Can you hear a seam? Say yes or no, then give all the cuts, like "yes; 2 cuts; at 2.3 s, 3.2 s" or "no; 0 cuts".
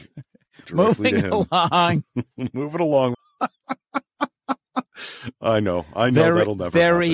yes; 1 cut; at 3.1 s